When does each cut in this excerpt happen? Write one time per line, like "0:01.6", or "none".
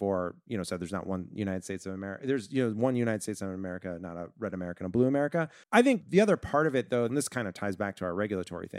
0:05.6
0:07.1